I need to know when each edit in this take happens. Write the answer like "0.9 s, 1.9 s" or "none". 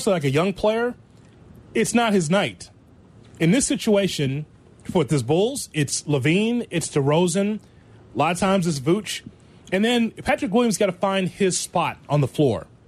none